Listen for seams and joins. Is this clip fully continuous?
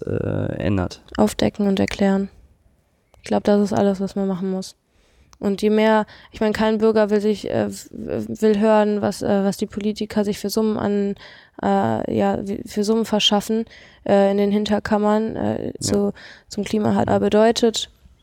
no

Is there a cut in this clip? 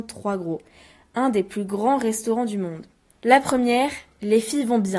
yes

